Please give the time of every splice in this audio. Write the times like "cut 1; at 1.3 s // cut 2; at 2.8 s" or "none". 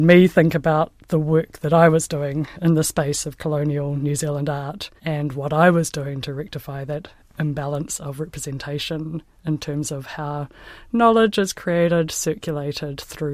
cut 1; at 5.0 s // cut 2; at 12.1 s